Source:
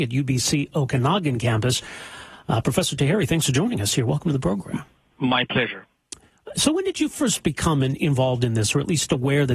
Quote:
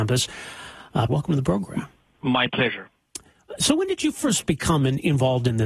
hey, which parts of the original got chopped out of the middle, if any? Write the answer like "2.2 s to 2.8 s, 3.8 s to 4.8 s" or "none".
2.6 s to 4.1 s